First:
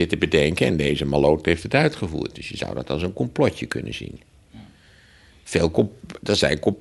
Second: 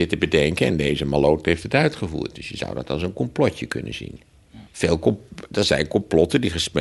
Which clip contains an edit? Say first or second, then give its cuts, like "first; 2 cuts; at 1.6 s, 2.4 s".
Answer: second; 1 cut; at 4.7 s